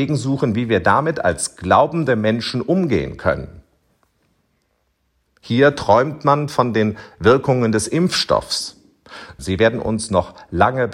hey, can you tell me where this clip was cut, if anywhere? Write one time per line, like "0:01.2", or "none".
0:05.3
0:09.4